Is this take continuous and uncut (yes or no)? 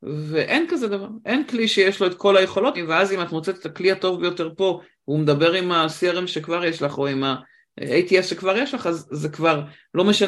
no